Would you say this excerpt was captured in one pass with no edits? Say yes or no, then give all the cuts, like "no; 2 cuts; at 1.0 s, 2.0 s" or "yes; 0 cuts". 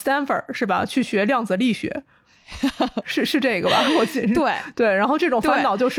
yes; 0 cuts